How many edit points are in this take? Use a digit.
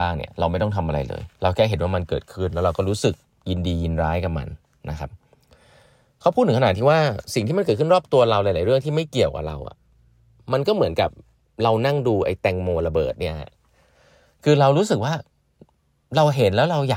1